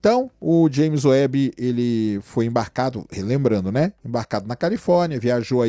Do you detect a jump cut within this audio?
no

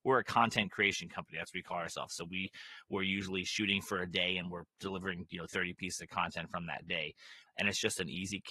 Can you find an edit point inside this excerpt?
yes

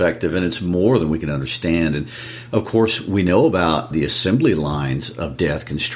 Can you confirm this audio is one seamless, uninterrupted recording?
no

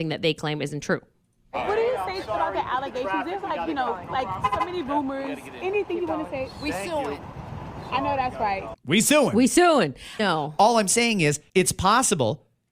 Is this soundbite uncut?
no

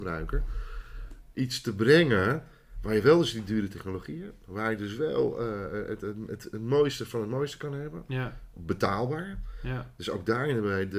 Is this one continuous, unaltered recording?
yes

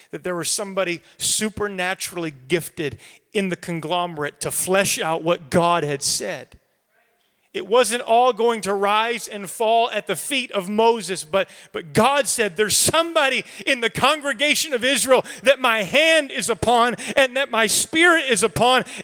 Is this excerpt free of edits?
yes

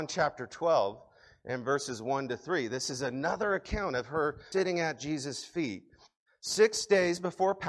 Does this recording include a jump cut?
yes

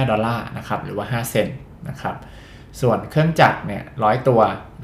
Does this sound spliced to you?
no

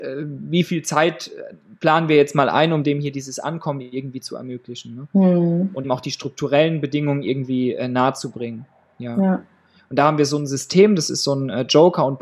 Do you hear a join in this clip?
yes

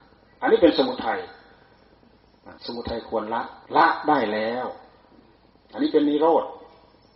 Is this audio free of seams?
no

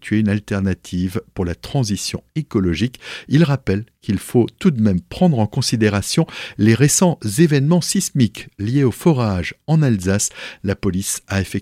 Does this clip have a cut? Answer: yes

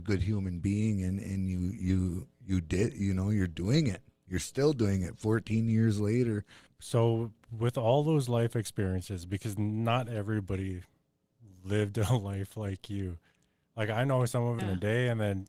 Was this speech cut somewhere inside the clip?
yes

